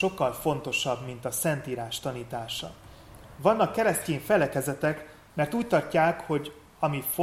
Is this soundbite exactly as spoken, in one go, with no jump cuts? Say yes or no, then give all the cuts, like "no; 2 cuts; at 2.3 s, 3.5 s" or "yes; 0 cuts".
no; 2 cuts; at 3.4 s, 5.3 s